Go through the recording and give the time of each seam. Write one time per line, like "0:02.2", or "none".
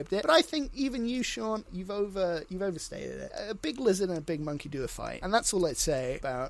0:01.7